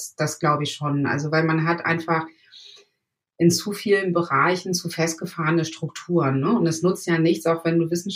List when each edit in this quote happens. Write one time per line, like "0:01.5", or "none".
none